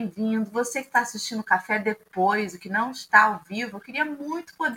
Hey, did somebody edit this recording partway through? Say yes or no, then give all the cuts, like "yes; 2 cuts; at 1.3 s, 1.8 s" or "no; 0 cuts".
no; 0 cuts